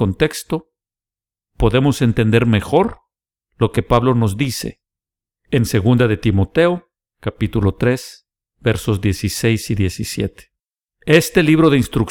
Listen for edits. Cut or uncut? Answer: cut